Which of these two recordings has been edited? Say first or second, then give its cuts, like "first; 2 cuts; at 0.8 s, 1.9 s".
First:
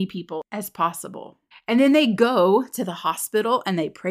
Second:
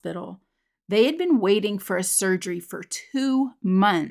first; 1 cut; at 1.5 s